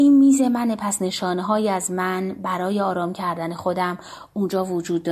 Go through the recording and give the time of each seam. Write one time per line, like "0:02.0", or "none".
none